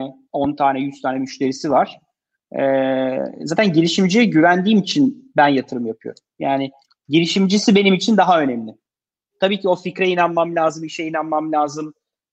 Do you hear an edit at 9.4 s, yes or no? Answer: no